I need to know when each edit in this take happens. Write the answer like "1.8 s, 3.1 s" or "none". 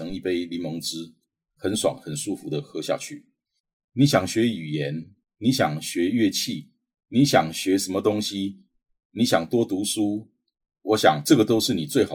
1.6 s, 3.7 s